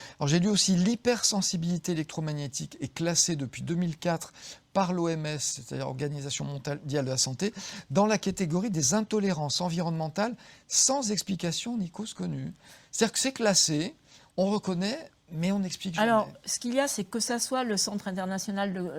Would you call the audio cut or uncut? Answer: cut